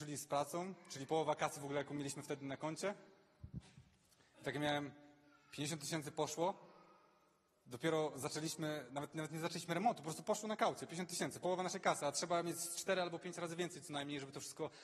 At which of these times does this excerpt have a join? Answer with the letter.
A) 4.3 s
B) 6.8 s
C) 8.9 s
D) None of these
D